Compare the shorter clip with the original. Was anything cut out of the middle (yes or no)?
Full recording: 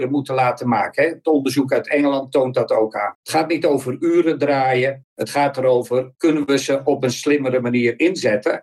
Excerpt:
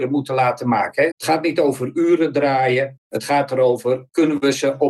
yes